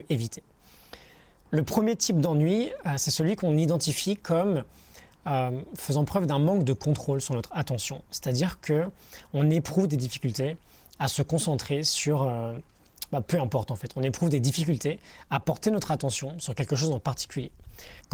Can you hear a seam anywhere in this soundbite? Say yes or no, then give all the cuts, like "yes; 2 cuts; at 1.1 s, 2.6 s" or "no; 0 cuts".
no; 0 cuts